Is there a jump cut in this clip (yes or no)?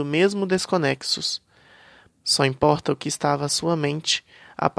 yes